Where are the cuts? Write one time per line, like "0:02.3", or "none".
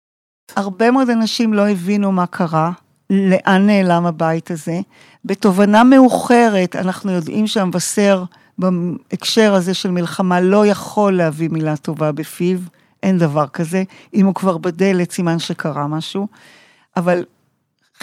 none